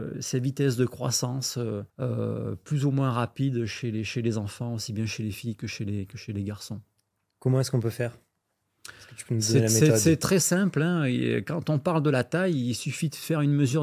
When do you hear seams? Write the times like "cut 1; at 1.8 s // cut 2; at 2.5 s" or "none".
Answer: cut 1; at 1.9 s